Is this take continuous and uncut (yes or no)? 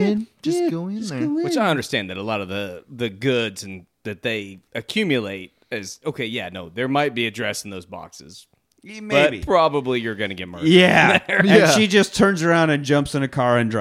no